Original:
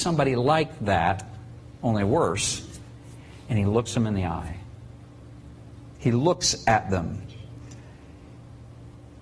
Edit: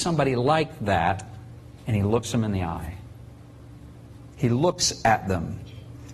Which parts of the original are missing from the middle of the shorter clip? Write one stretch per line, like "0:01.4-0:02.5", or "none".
0:01.8-0:03.4